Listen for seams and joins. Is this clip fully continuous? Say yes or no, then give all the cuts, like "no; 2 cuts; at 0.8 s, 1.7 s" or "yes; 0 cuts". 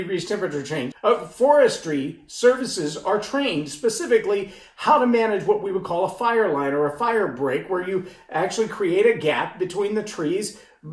no; 1 cut; at 0.9 s